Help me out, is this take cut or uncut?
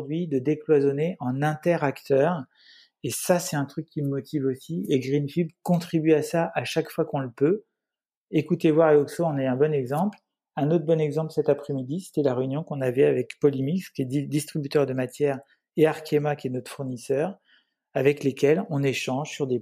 uncut